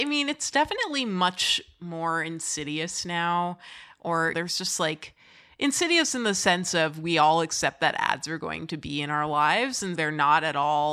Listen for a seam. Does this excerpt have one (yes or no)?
yes